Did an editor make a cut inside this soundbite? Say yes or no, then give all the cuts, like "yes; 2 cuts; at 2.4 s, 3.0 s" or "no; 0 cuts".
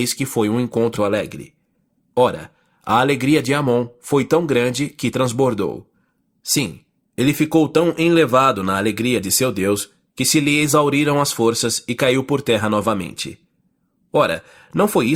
yes; 1 cut; at 1.0 s